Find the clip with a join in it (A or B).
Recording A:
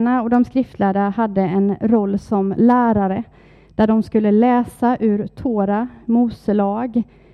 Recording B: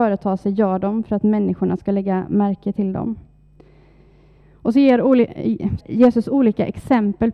B